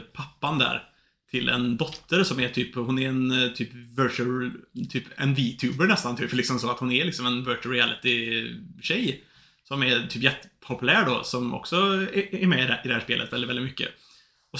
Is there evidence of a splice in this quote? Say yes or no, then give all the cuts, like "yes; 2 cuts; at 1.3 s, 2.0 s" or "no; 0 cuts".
no; 0 cuts